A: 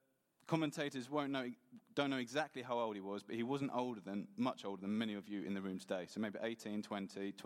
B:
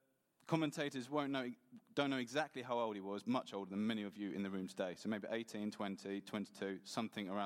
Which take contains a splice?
B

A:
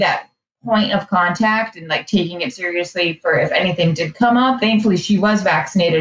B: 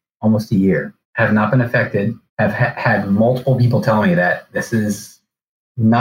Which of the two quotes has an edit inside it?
B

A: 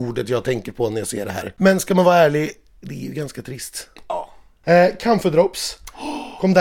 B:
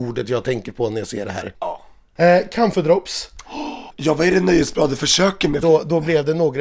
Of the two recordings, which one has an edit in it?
B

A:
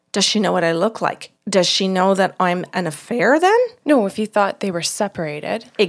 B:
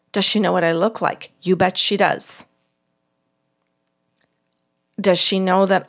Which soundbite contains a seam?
A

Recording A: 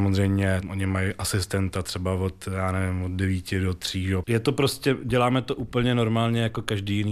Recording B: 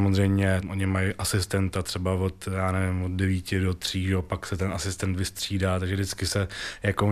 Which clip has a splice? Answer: A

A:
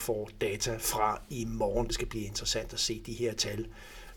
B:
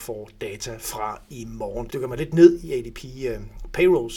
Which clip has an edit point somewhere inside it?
B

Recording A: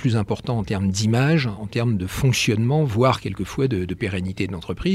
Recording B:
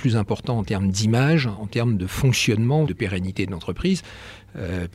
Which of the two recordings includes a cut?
B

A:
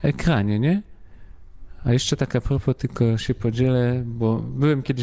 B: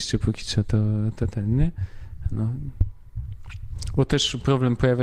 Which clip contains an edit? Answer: A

